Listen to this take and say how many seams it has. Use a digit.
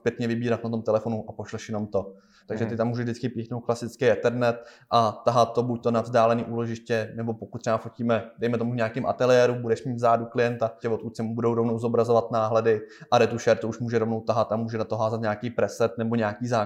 2